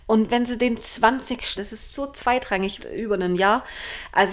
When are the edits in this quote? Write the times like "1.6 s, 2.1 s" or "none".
1.6 s, 2.8 s